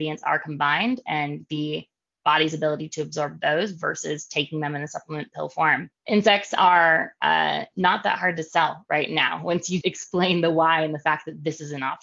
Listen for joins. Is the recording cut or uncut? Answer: cut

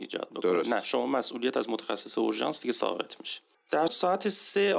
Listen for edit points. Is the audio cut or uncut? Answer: cut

